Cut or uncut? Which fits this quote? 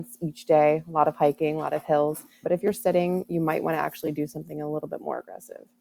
cut